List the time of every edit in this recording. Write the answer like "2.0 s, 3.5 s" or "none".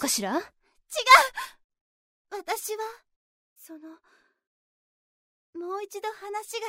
3.6 s